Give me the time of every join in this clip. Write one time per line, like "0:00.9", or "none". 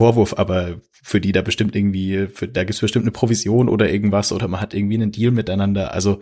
none

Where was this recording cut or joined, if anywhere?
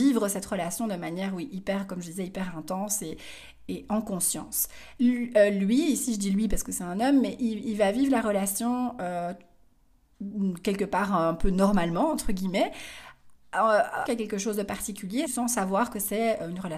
0:05.0
0:14.1
0:15.3

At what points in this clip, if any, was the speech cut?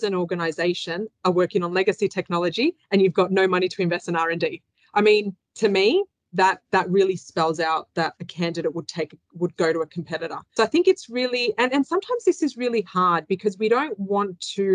0:10.6

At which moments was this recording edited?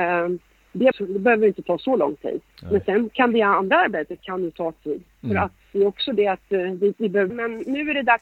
0:00.9
0:07.3

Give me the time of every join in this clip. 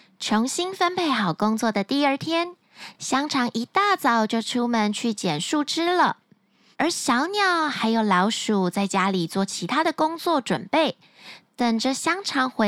none

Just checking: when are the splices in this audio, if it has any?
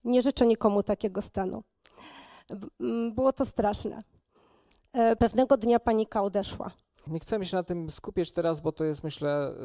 0:05.2
0:07.1

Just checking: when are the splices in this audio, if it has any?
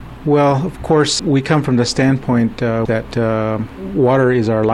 0:01.2
0:02.9

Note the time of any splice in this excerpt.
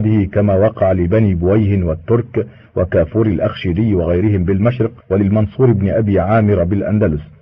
0:05.0

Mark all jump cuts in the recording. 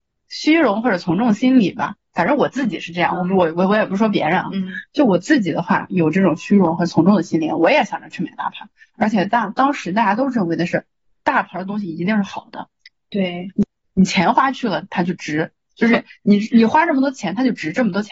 none

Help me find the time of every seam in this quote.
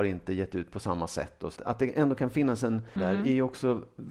0:01.6
0:03.0

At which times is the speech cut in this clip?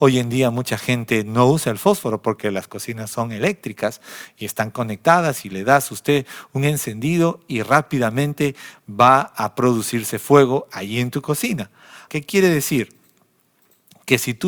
0:12.1

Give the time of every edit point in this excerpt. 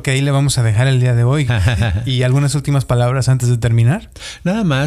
0:01.5

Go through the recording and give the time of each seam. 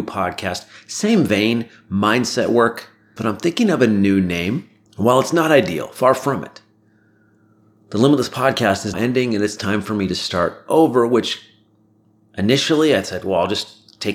0:03.2
0:04.9
0:08.9

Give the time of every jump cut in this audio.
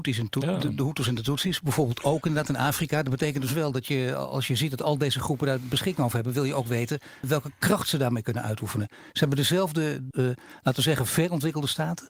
0:07.2
0:10.1

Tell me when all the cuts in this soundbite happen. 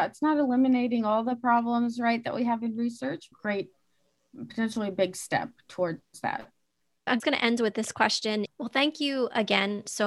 0:03.3
0:07.2
0:08.5

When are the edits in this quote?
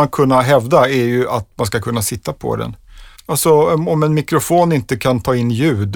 0:03.2

